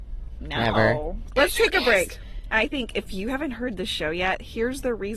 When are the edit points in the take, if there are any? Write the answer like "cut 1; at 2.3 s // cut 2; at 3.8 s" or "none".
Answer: cut 1; at 1.3 s